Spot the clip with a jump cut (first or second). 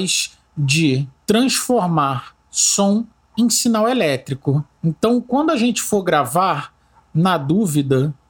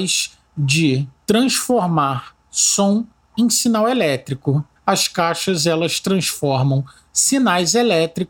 second